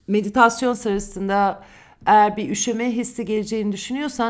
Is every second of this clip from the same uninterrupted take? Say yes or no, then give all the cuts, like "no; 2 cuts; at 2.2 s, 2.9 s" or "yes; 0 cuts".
yes; 0 cuts